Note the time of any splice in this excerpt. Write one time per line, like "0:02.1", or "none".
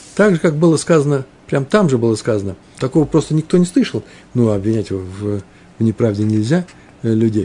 0:02.8
0:04.2